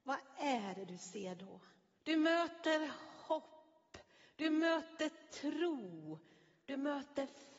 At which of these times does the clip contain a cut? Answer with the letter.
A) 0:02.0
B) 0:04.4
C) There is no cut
A